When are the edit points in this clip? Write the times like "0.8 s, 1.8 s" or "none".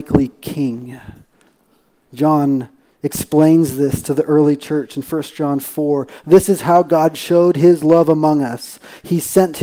none